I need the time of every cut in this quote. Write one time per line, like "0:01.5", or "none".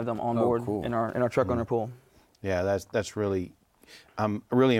none